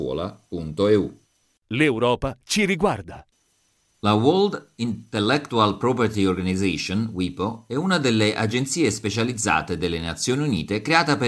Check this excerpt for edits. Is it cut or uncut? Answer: uncut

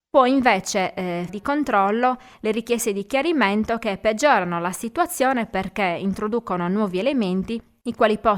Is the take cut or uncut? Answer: cut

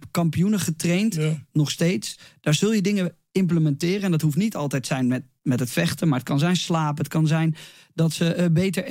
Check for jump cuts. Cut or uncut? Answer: uncut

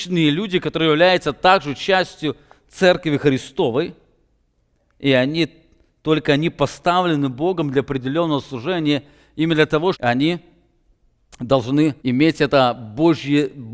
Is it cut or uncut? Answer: cut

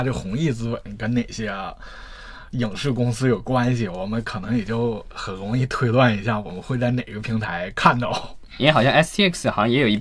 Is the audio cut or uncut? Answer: uncut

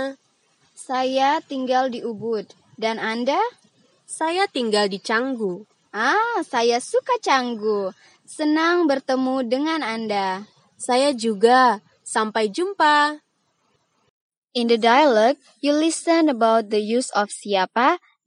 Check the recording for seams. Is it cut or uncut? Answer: uncut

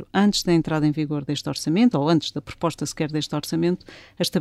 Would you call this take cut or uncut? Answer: uncut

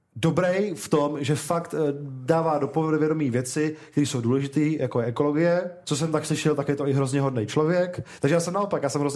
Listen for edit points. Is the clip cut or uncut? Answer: cut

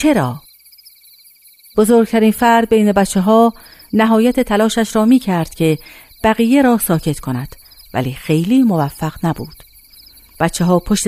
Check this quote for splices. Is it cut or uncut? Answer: uncut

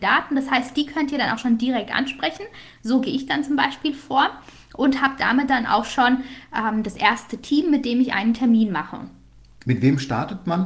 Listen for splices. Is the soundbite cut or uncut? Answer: cut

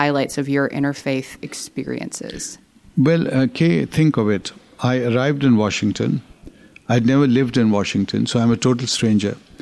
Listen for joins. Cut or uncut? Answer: uncut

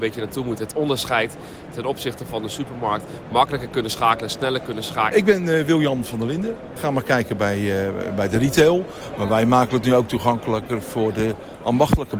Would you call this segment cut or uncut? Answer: cut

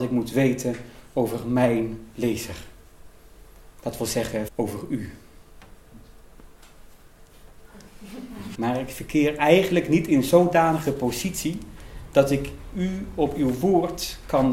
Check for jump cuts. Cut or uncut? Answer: cut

